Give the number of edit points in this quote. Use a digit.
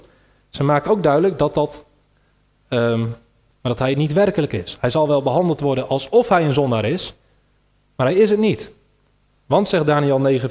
1